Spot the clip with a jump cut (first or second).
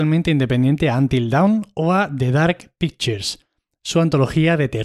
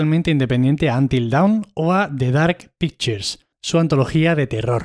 second